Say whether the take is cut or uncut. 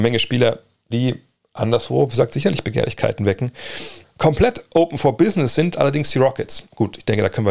cut